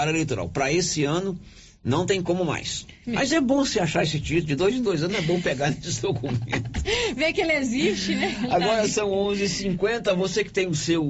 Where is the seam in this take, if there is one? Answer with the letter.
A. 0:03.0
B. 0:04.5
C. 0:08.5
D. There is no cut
A